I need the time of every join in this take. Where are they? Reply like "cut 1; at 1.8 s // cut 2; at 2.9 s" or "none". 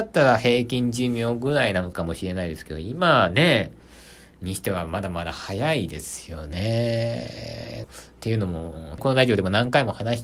cut 1; at 7.8 s // cut 2; at 9.0 s

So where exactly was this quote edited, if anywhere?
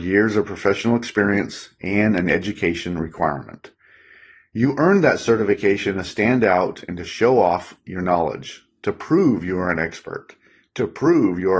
none

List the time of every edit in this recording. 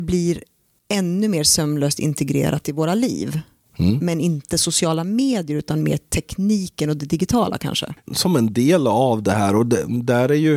cut 1; at 8.1 s

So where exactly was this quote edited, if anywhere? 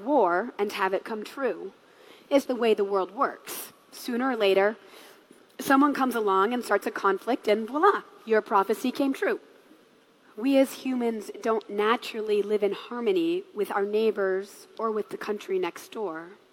cut 1; at 2.5 s // cut 2; at 10.2 s

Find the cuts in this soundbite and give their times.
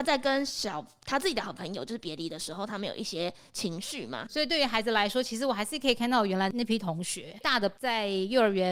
cut 1; at 4.3 s

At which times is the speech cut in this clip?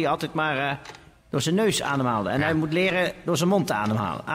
none

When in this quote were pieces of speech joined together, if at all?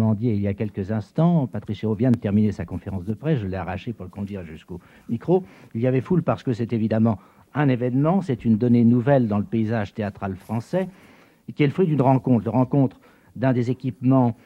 none

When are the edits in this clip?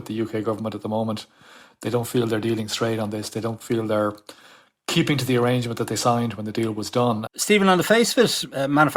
cut 1; at 7.3 s

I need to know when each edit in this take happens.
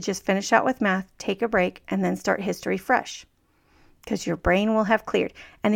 none

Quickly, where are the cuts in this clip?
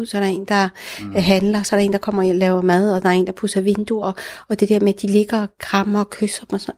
none

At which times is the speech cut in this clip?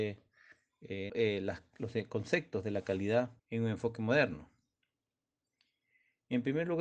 cut 1; at 1.1 s // cut 2; at 3.4 s

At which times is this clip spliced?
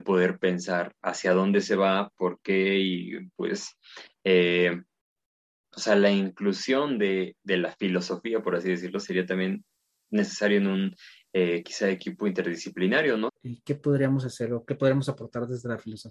cut 1; at 13.3 s

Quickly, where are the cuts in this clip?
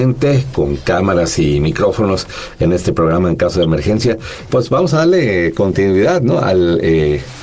cut 1; at 4.5 s

